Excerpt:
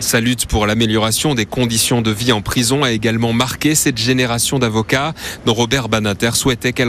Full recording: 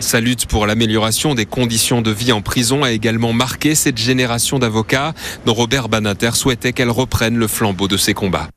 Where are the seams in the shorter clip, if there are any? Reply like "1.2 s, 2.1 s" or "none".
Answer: none